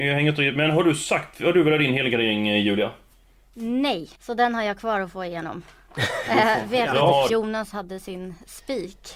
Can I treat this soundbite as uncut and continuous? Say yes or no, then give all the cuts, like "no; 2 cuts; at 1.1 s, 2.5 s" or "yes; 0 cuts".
no; 2 cuts; at 4.1 s, 7.3 s